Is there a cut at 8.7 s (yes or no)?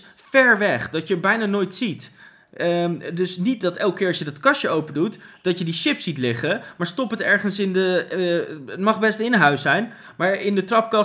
no